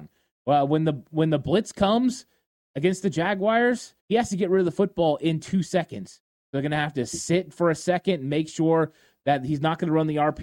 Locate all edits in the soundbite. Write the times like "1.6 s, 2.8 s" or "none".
4.0 s, 6.4 s

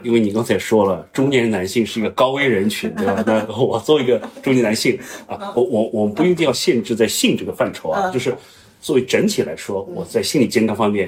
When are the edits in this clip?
none

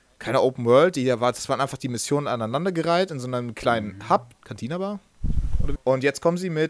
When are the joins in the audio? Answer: 4.3 s, 5.8 s

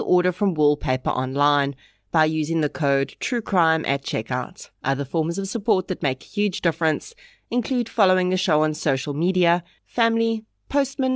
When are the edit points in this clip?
4.7 s, 9.8 s

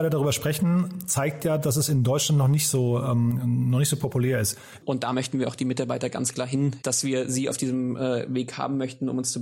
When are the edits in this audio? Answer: 4.8 s, 6.8 s

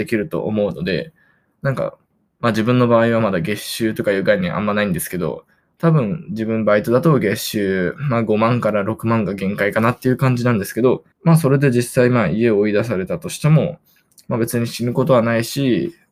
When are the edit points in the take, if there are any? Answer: 11.1 s

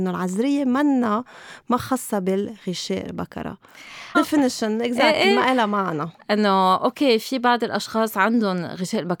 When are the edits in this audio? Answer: 4.1 s

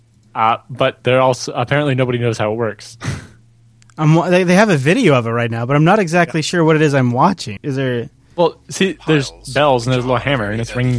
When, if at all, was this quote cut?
7.6 s

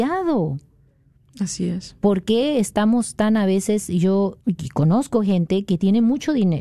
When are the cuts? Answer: 4.4 s

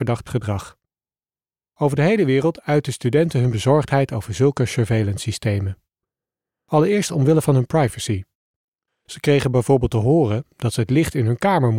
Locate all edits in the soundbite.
8.9 s

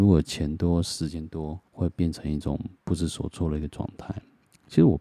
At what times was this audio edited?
1.7 s

